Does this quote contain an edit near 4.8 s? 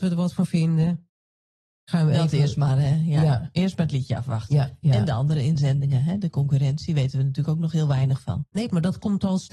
no; 0 cuts

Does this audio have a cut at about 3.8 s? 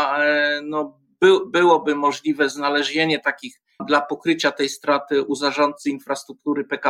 yes; 1 cut; at 3.8 s

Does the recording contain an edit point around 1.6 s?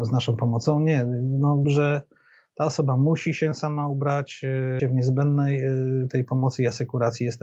yes; 2 cuts; at 1.6 s, 4.8 s

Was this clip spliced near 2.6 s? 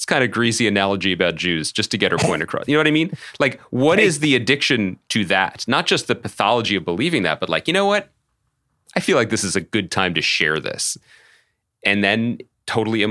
no; 0 cuts

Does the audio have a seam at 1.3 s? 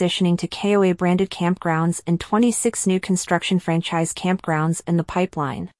no; 0 cuts

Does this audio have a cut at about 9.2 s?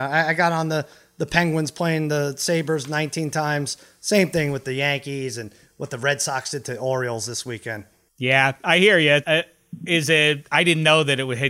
yes; 2 cuts; at 8.1 s, 9.2 s

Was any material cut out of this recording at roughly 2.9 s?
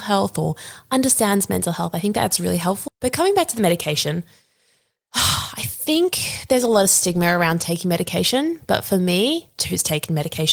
yes; 2 cuts; at 2.9 s, 9.6 s

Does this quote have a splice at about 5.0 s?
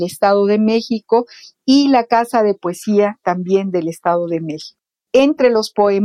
yes; 1 cut; at 5.0 s

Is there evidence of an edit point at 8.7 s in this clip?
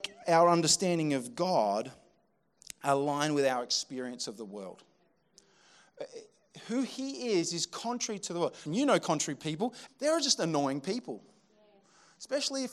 yes; 2 cuts; at 8.7 s, 9.9 s

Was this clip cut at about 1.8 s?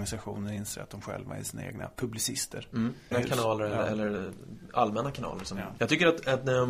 no; 2 cuts; at 3.1 s, 5.8 s

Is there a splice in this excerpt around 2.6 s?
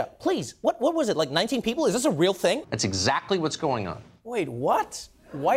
yes; 1 cut; at 2.6 s

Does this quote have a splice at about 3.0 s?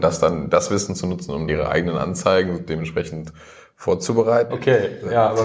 no; 2 cuts; at 1.5 s, 4.5 s

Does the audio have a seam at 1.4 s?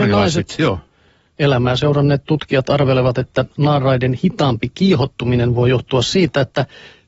yes; 1 cut; at 1.4 s

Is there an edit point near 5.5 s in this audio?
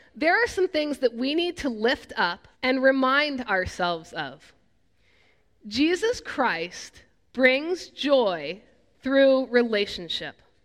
no; 1 cut; at 2.5 s

